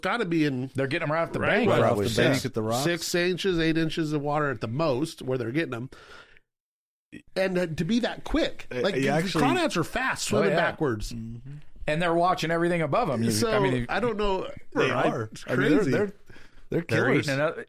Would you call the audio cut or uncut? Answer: cut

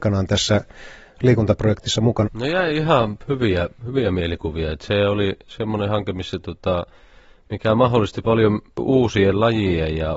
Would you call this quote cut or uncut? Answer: cut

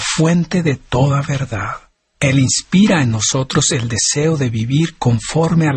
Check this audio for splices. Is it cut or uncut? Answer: cut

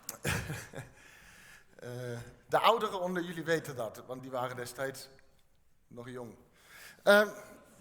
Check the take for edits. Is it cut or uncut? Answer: uncut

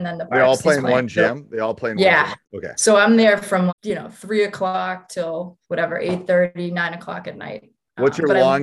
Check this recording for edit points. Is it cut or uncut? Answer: cut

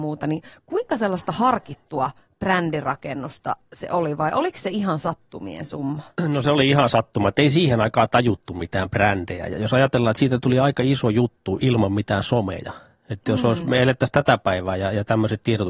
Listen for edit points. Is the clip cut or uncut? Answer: uncut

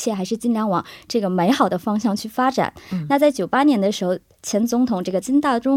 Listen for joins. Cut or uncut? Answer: uncut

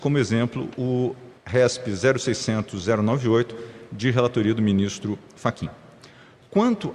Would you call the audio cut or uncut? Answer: cut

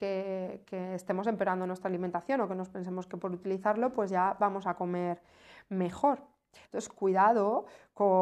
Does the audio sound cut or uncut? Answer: cut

